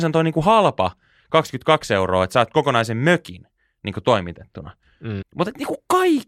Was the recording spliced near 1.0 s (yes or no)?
no